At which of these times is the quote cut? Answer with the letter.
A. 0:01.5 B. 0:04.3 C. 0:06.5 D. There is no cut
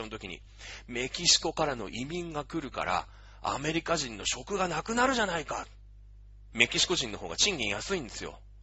C